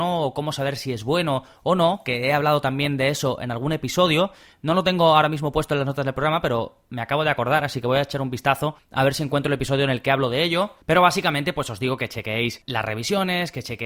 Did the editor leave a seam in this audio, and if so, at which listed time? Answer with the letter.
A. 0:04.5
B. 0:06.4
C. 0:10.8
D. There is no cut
D